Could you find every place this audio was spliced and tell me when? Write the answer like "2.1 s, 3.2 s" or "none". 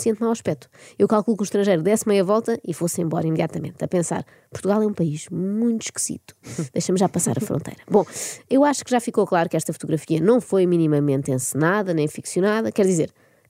none

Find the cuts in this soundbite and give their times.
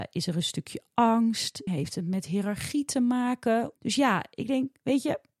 1.7 s, 3.7 s

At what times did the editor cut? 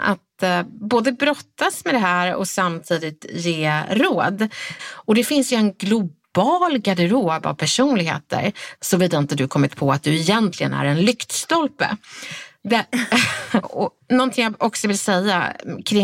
4.8 s, 8.8 s, 13.6 s

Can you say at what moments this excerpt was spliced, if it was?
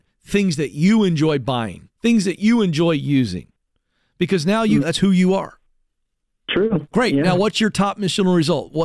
2.0 s, 4.8 s

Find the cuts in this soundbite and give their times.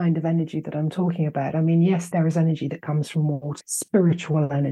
2.1 s, 3.6 s

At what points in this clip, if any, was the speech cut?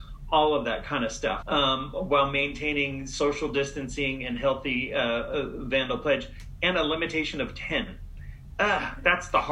1.4 s

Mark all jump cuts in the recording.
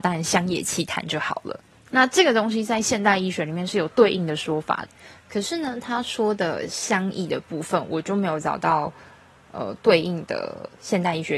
1.9 s

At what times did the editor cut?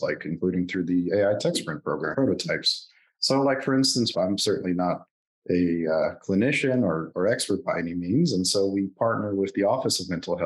2.1 s, 4.1 s

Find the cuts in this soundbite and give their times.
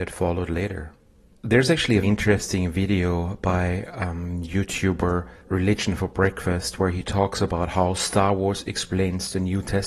2.0 s, 5.4 s

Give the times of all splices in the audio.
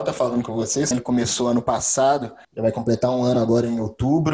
0.9 s, 2.4 s

